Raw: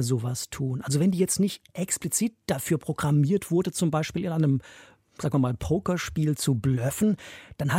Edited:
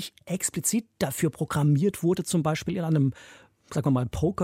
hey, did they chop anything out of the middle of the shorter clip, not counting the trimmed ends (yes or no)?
no